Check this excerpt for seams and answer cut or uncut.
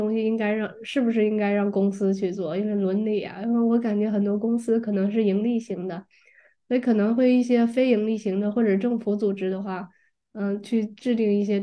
uncut